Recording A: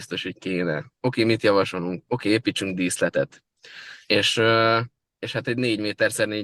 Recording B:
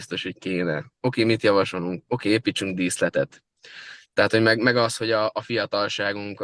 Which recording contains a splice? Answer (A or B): B